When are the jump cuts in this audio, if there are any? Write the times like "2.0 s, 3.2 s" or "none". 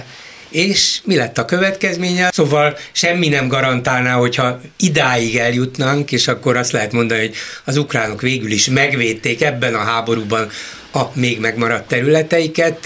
2.3 s